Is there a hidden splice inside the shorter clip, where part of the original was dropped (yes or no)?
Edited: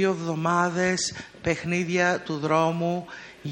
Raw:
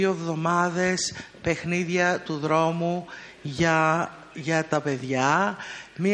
no